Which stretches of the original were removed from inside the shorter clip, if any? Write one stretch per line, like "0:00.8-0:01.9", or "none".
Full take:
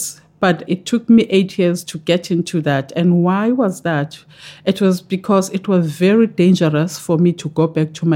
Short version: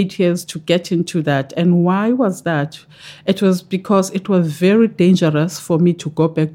none

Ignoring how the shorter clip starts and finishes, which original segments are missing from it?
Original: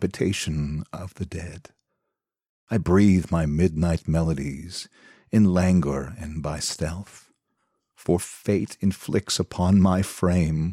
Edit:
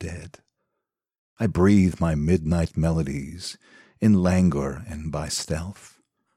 none

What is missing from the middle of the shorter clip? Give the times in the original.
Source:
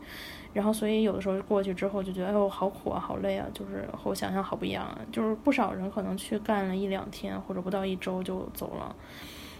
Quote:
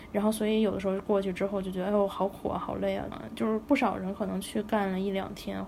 0:03.5-0:04.9

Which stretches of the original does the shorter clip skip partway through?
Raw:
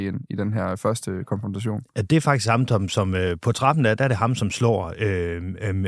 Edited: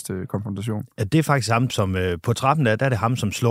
0:02.7-0:02.9

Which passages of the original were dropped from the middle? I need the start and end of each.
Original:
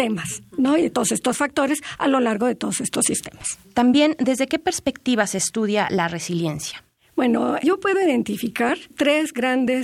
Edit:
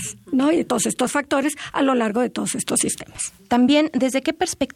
none

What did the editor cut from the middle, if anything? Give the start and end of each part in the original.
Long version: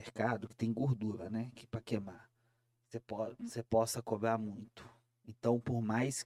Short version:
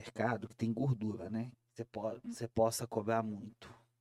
0:01.5-0:02.7

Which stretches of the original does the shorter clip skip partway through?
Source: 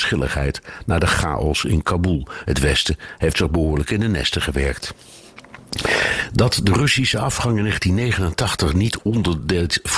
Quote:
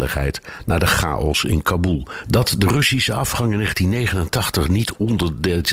0:02.4-0:06.3

